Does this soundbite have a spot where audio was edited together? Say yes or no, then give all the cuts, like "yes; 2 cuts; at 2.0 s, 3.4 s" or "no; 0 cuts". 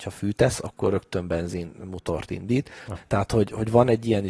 yes; 1 cut; at 3.0 s